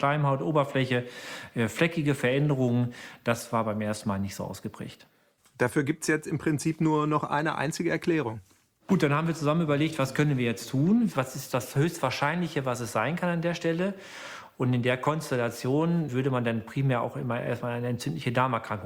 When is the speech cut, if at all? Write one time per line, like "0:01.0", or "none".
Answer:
0:05.4
0:16.1